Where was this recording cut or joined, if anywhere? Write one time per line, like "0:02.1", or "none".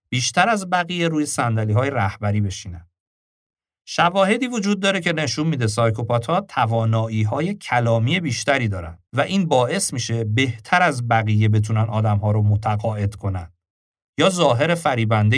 0:09.1